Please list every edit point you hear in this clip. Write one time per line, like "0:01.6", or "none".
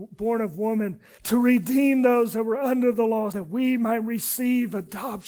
0:01.2
0:03.3